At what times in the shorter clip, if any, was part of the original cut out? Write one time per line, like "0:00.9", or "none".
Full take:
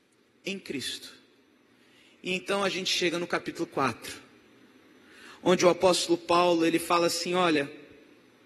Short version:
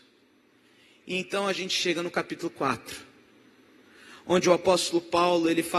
none